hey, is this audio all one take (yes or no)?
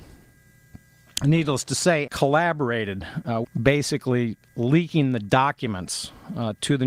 no